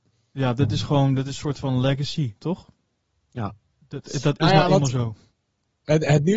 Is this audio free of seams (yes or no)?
yes